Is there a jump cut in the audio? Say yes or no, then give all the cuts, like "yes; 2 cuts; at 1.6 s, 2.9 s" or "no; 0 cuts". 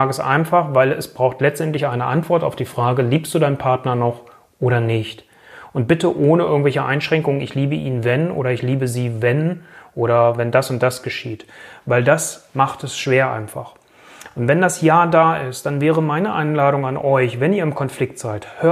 no; 0 cuts